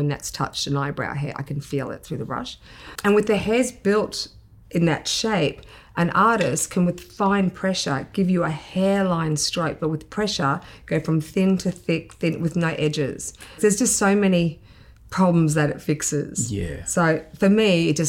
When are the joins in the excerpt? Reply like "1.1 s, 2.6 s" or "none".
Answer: 13.6 s